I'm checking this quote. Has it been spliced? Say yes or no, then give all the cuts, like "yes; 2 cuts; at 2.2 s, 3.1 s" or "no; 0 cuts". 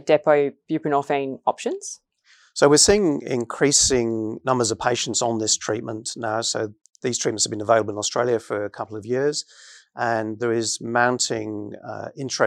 no; 0 cuts